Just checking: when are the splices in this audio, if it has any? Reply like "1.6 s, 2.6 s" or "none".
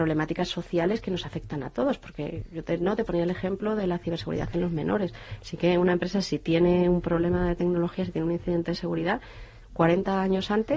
5.4 s, 9.6 s